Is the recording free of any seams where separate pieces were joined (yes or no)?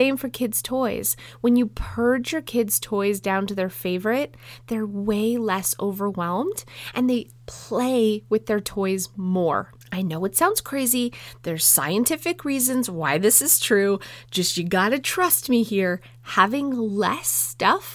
no